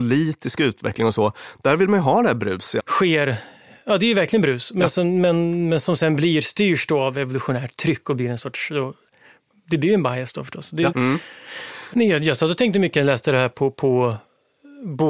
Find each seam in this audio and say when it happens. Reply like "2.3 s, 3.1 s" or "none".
2.8 s, 10.9 s, 11.9 s